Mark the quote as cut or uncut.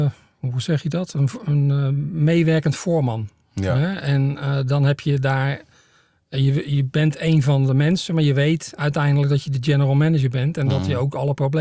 uncut